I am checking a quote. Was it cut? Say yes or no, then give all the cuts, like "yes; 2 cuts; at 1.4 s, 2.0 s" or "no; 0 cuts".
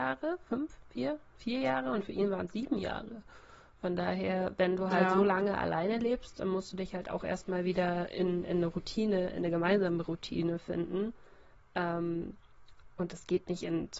no; 0 cuts